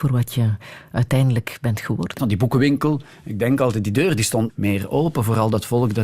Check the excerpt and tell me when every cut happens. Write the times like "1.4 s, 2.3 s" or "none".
2.2 s, 4.5 s